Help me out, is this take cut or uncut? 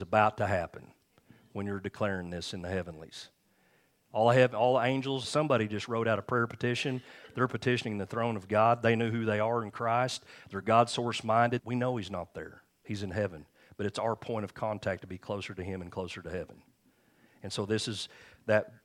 cut